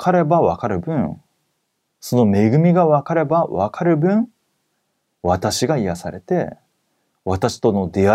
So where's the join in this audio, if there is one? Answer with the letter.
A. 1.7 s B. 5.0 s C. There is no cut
C